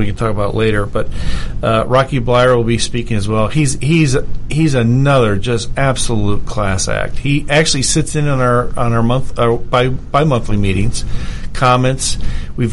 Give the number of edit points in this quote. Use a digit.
0